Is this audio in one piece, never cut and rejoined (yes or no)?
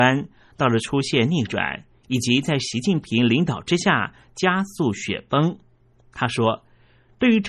yes